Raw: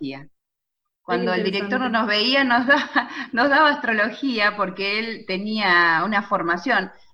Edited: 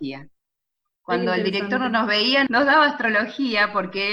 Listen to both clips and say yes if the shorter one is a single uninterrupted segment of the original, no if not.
no